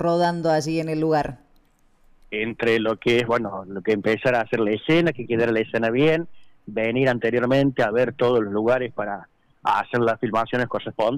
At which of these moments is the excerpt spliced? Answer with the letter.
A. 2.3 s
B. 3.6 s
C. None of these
A